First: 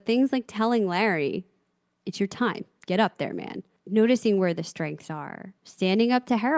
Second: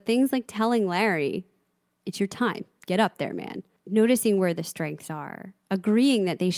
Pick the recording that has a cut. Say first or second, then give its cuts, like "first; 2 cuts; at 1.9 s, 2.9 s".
first; 1 cut; at 5.6 s